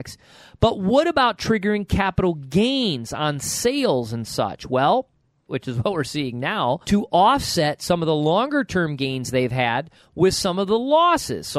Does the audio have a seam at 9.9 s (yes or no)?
no